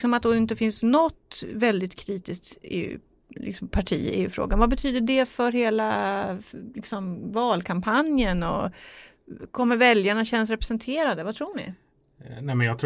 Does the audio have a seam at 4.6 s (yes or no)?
no